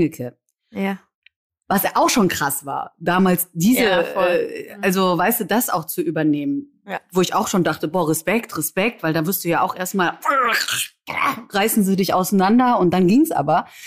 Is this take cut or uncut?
uncut